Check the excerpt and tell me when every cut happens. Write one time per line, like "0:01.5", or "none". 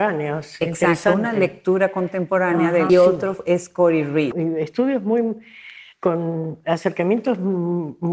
0:02.9
0:04.3